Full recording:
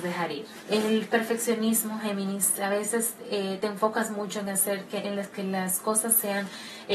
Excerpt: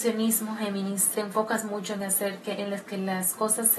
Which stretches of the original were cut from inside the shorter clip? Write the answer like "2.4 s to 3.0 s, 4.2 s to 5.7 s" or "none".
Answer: 2.6 s to 3.6 s